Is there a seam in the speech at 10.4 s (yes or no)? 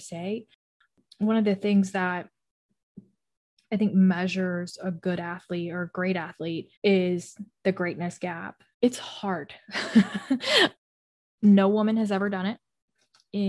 no